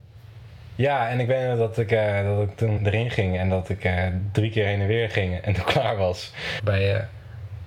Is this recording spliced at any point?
yes; 2 cuts; at 2.8 s, 6.6 s

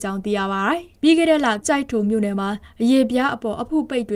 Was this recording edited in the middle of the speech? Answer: yes; 1 cut; at 1.6 s

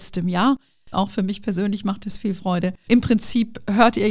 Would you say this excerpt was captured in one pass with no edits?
no; 2 cuts; at 0.9 s, 2.9 s

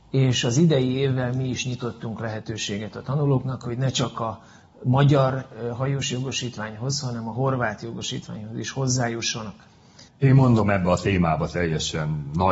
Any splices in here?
yes; 1 cut; at 10.1 s

